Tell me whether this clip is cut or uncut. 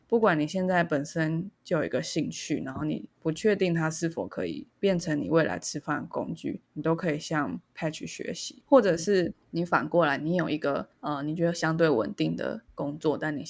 uncut